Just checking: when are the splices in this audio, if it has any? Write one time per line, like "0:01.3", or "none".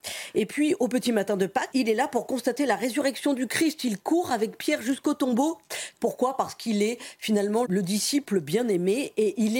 0:01.7
0:06.0
0:07.6